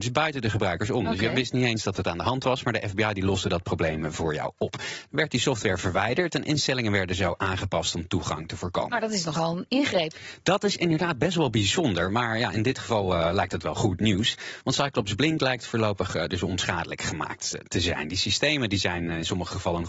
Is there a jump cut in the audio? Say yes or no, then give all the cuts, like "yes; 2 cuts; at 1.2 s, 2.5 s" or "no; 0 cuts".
no; 0 cuts